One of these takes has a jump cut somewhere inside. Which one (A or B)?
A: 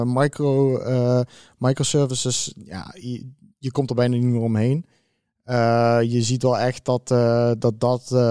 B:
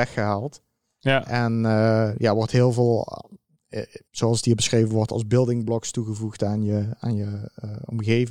B